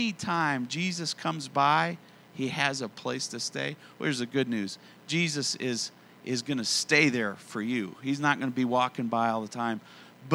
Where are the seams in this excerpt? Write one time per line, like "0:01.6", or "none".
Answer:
none